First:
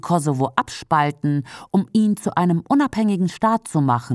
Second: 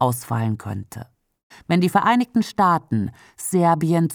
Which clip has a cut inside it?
second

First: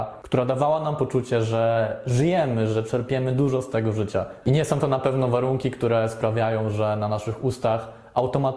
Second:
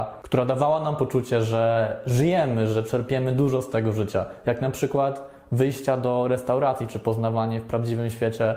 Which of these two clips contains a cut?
first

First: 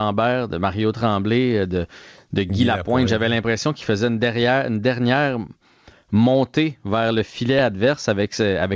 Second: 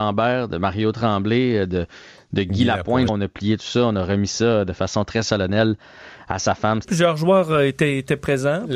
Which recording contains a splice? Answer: second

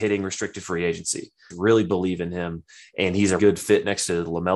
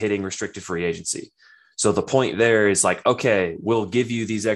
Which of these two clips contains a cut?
first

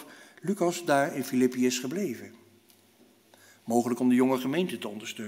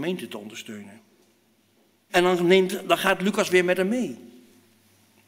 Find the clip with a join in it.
second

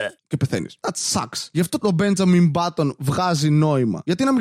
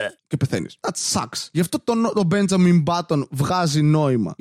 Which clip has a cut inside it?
first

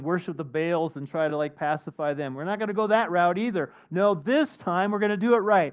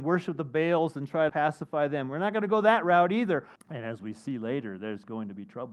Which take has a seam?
second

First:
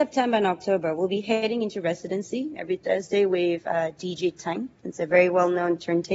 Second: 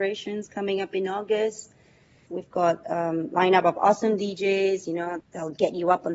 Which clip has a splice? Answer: second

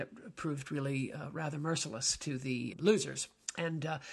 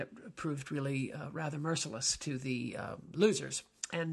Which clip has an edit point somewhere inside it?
first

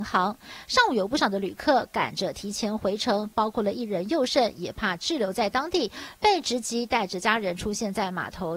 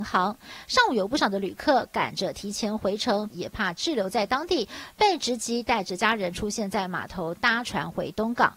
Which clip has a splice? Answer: second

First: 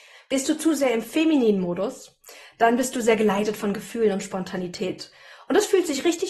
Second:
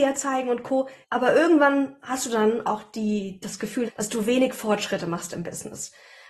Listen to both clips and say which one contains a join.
second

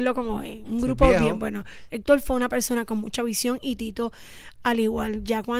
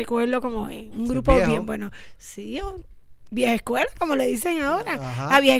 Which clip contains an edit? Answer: first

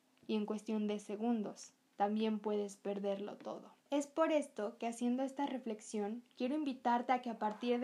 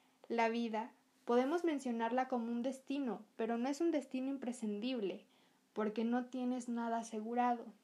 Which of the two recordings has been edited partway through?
first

